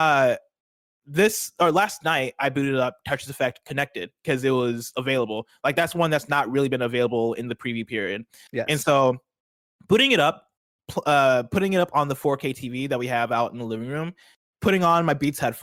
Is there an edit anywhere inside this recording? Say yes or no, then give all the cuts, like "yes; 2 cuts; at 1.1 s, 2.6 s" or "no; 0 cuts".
no; 0 cuts